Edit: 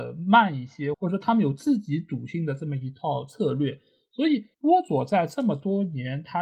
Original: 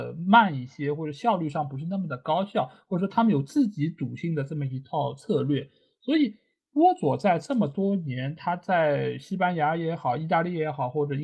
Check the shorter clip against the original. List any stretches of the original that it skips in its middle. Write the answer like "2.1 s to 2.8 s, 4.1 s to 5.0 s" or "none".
0.9 s to 2.8 s, 6.4 s to 6.7 s